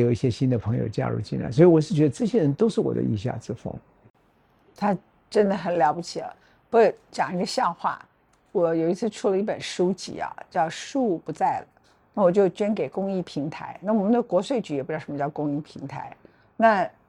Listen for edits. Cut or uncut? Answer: uncut